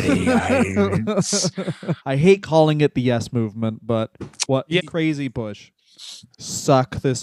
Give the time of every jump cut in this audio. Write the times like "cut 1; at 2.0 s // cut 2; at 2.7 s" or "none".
cut 1; at 2.0 s // cut 2; at 4.8 s // cut 3; at 6.3 s